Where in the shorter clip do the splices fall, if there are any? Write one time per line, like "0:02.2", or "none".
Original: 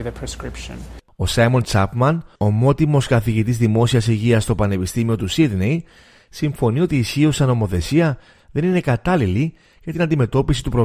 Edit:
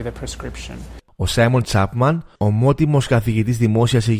none